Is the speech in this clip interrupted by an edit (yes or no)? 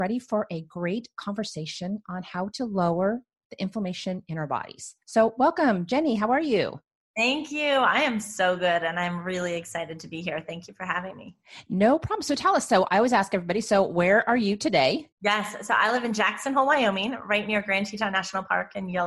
yes